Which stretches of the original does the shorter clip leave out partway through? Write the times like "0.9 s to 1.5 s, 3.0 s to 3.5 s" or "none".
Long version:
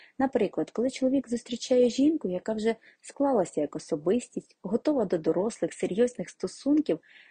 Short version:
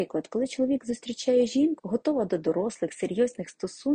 2.2 s to 4.6 s

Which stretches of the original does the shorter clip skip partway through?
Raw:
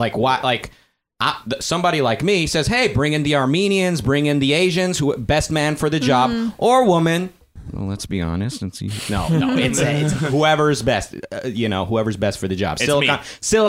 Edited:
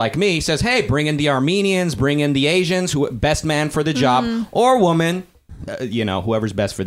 7.7 s to 11.3 s

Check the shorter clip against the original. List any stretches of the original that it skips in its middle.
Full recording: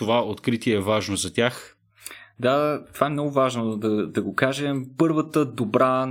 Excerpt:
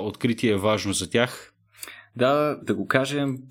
2.8 s to 4.1 s

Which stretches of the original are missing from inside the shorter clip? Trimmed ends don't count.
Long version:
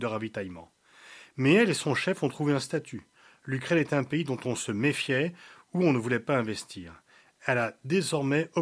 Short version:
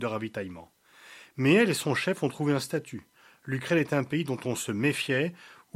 none

